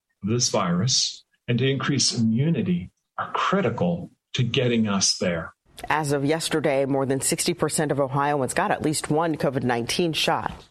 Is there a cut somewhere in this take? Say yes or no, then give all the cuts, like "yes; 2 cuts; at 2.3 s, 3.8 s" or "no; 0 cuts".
no; 0 cuts